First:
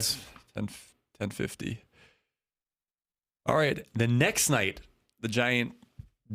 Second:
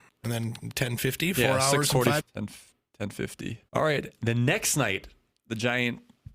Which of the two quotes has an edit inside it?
second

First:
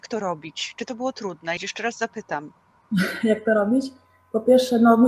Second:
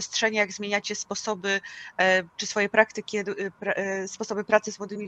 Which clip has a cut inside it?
first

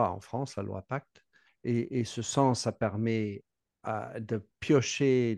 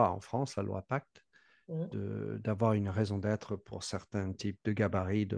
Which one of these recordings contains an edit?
first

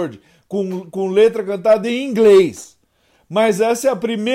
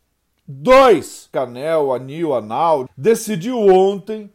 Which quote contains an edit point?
second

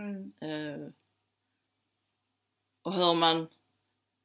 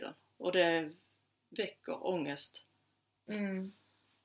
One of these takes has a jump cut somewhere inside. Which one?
second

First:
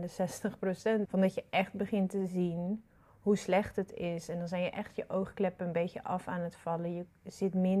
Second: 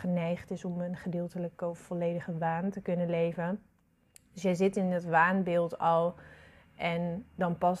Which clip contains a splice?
first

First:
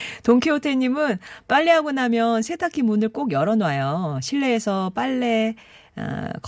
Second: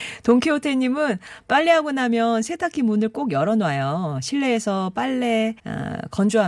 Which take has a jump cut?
second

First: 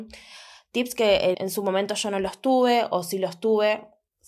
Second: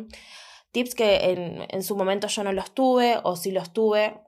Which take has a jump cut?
first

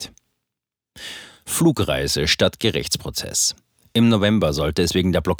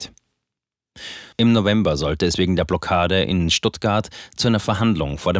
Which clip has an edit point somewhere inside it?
second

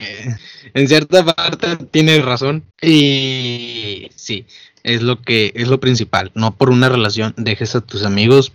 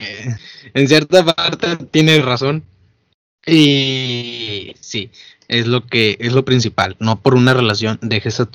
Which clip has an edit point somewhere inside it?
first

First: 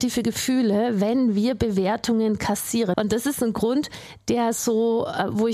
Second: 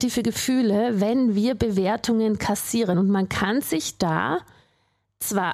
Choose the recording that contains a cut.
first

